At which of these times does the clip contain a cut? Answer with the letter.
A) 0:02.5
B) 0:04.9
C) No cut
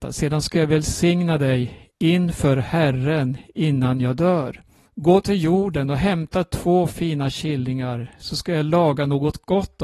B